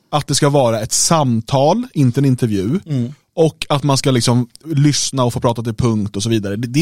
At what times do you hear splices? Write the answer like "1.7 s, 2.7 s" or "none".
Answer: 4.6 s